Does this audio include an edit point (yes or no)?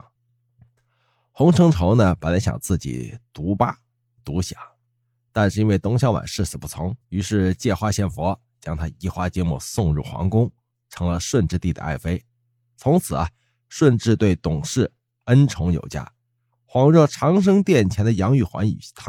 yes